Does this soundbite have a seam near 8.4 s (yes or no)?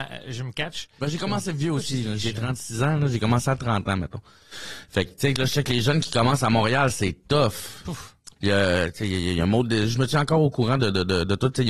yes